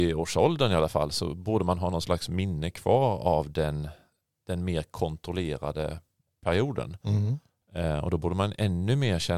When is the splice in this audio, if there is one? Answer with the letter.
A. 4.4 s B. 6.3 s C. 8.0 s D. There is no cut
D